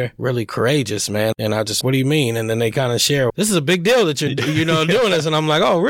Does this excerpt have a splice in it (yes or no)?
yes